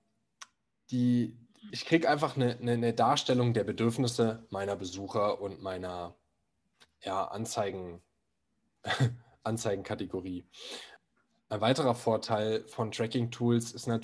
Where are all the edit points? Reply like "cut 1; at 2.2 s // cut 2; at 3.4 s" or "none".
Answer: cut 1; at 1.7 s